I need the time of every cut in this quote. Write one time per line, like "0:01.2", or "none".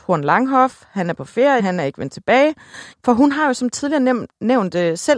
0:01.6
0:02.9